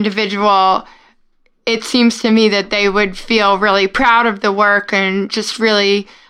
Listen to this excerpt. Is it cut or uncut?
uncut